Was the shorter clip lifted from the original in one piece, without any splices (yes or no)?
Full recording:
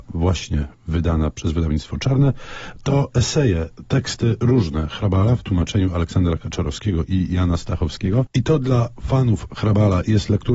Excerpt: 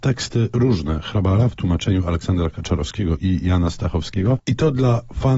yes